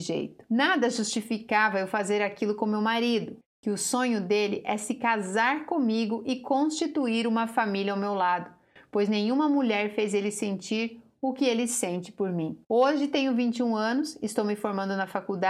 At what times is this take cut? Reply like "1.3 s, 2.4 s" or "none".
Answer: 3.4 s, 12.6 s